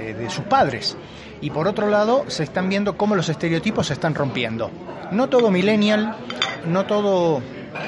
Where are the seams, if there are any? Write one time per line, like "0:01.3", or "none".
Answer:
0:06.6